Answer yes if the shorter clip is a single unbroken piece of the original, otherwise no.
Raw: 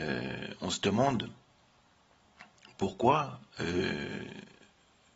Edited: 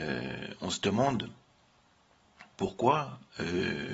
no